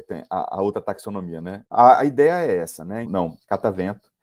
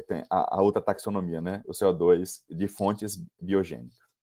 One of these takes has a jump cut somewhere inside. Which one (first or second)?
first